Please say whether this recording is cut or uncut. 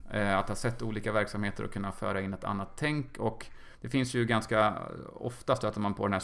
cut